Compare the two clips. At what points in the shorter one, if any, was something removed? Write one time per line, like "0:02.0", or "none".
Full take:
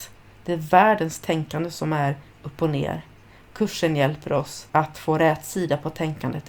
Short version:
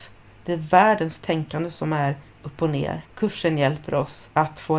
0:03.1